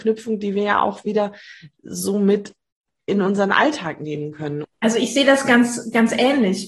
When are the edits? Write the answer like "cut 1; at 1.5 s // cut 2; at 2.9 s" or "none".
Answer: cut 1; at 4.6 s